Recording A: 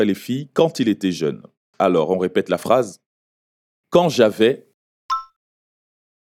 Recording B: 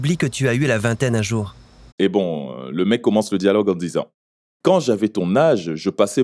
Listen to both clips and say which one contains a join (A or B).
B